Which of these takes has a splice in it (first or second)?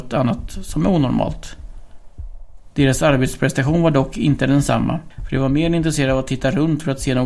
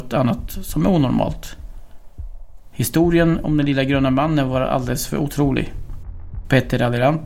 second